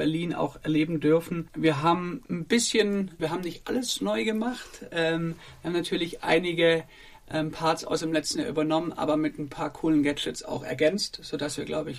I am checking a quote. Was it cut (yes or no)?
yes